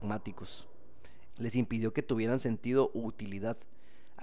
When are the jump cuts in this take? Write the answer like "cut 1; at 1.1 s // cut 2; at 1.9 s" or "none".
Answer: cut 1; at 1.3 s